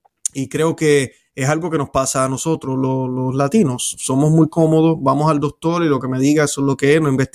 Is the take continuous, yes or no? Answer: yes